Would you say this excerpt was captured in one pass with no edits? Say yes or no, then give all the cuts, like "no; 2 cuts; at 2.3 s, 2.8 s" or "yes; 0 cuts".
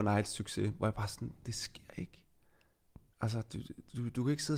yes; 0 cuts